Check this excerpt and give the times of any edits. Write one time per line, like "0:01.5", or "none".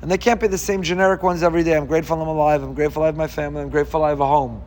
none